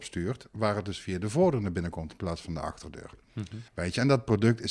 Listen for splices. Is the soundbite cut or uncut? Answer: cut